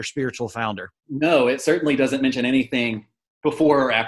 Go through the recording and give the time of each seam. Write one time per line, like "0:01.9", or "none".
0:01.0